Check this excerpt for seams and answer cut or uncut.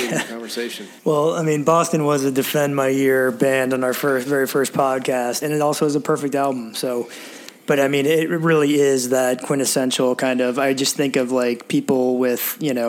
cut